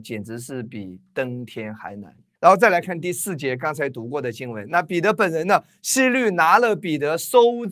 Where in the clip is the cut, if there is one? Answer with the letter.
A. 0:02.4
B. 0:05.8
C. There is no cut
A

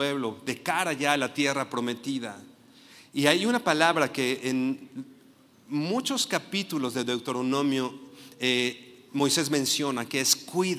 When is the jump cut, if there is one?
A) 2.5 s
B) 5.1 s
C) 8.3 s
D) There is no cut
D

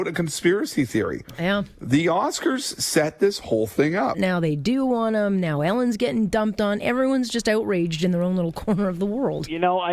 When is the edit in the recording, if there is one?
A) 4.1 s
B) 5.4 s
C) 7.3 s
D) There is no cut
A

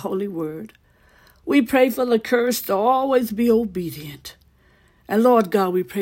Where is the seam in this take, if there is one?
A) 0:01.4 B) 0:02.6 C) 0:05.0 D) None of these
D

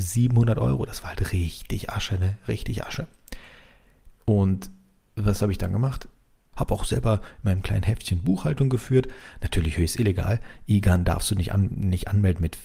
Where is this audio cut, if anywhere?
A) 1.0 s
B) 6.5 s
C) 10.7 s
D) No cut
B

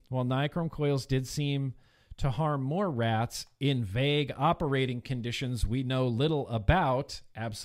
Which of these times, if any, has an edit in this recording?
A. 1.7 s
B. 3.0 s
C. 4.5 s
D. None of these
D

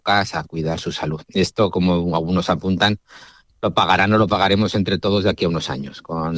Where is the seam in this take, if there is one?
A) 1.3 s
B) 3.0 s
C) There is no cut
C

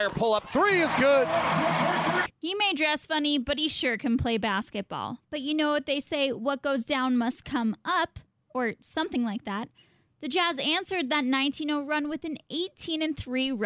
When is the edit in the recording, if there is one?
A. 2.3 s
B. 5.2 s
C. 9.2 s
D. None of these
B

